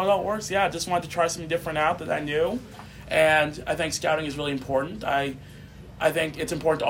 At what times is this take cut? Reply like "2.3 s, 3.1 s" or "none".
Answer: none